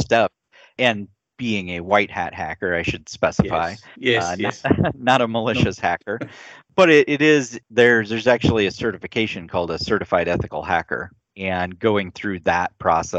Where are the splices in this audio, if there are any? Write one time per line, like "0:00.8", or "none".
none